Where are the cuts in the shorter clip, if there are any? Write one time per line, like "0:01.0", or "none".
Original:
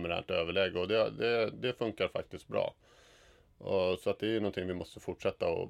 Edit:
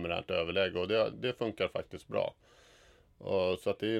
0:01.1